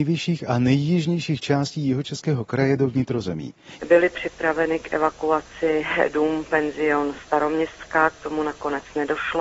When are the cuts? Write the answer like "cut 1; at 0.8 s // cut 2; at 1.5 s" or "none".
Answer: cut 1; at 3.8 s